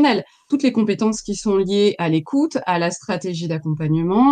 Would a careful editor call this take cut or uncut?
uncut